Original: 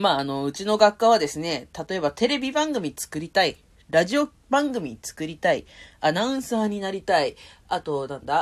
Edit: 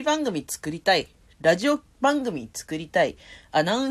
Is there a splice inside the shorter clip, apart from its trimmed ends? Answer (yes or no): no